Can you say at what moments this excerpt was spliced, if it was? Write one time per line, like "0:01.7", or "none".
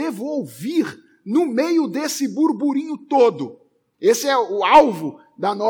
0:03.9